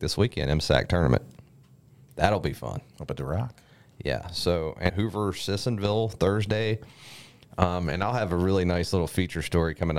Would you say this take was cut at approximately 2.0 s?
no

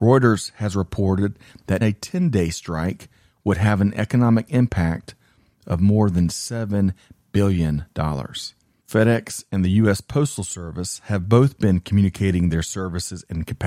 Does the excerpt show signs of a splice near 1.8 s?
yes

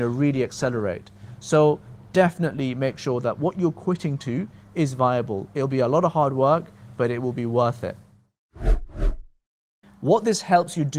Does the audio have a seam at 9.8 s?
yes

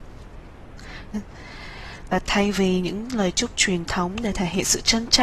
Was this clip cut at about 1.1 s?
yes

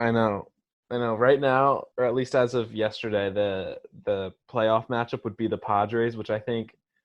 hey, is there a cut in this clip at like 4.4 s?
yes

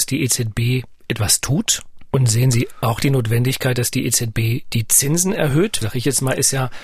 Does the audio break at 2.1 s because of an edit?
yes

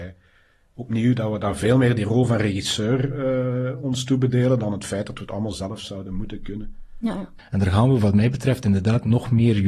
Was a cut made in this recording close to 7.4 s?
yes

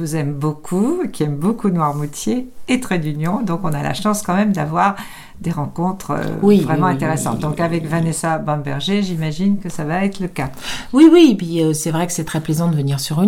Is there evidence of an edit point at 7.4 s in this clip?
no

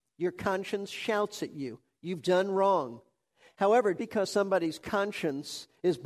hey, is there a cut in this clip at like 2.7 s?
no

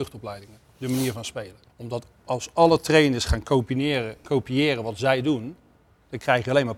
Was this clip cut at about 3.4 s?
no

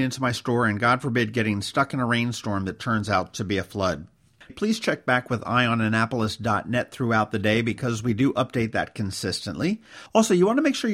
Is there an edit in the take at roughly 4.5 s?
yes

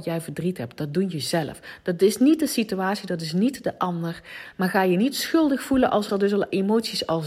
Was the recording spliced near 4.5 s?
yes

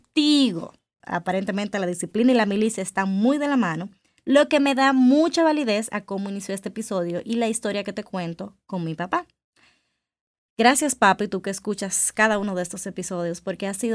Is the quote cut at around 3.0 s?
no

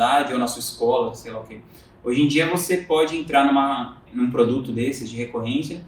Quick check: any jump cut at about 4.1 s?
yes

